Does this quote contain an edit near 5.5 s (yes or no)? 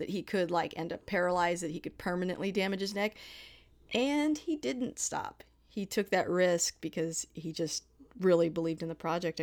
no